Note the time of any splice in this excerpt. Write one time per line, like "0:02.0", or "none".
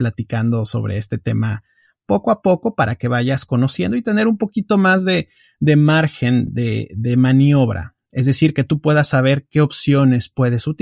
none